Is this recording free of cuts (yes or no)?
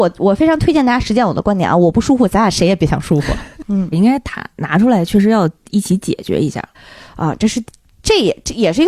no